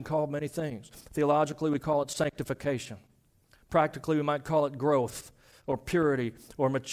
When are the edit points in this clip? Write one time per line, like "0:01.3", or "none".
none